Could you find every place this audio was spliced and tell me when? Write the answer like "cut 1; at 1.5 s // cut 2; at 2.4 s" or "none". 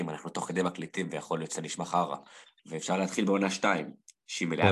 cut 1; at 2.6 s